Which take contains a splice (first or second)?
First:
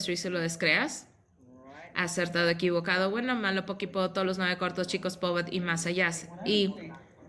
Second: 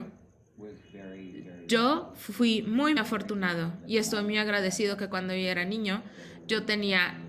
second